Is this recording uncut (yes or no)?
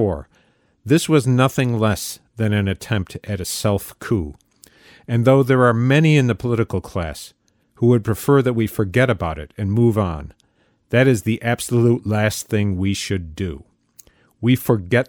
yes